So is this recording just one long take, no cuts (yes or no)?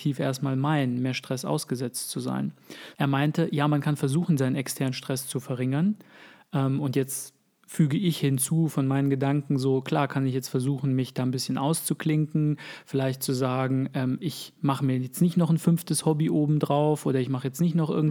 no